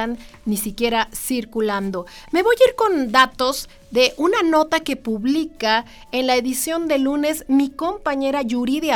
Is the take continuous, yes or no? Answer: yes